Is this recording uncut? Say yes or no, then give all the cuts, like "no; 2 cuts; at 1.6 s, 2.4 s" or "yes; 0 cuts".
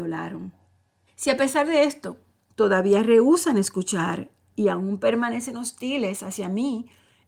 no; 1 cut; at 1.1 s